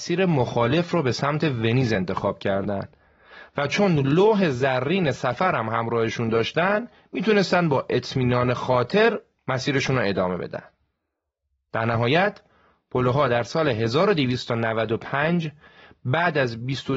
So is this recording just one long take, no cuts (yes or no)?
yes